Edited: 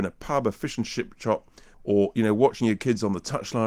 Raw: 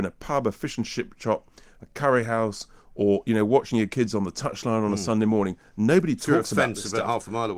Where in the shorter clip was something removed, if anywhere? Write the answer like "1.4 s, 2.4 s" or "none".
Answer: 1.7 s